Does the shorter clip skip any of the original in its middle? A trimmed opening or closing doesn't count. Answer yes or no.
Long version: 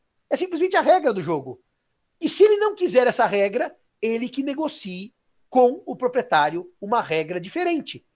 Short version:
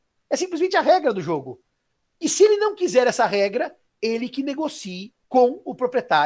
yes